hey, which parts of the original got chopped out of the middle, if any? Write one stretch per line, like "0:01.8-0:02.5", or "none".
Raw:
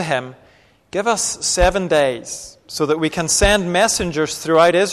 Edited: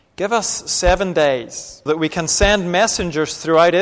0:02.6-0:02.9